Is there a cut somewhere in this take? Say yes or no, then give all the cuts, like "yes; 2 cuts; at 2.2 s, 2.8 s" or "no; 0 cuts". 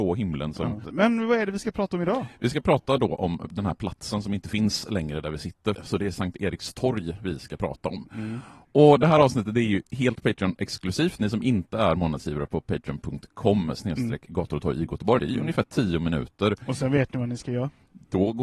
yes; 3 cuts; at 5.7 s, 11.2 s, 15.2 s